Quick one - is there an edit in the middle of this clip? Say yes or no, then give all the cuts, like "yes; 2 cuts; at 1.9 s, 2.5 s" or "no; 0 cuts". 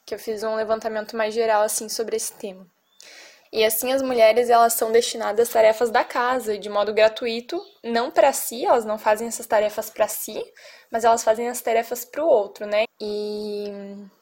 yes; 2 cuts; at 3.4 s, 12.8 s